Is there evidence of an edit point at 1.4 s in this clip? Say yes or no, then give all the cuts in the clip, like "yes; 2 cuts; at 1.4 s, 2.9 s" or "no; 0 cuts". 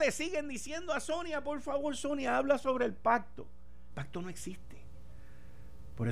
no; 1 cut; at 3.9 s